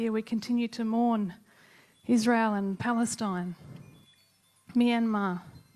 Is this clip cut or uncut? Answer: uncut